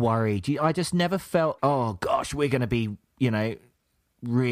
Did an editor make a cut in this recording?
yes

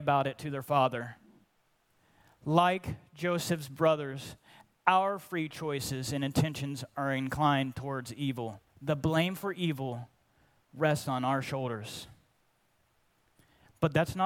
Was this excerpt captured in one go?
no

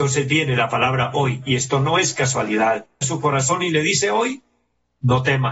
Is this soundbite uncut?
no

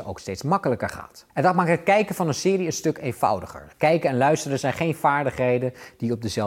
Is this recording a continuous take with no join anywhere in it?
yes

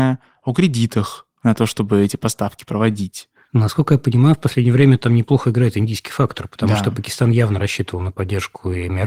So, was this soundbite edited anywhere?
no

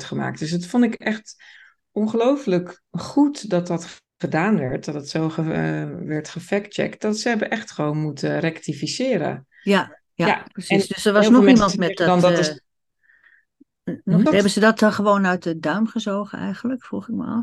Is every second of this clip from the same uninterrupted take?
no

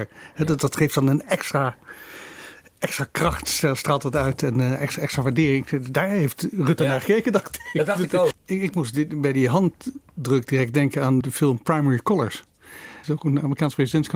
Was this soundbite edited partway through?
yes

